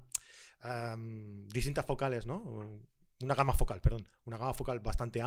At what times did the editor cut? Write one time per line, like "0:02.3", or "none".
none